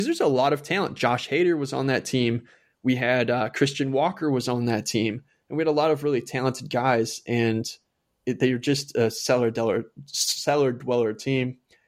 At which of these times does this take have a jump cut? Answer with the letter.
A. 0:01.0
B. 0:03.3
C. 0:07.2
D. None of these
D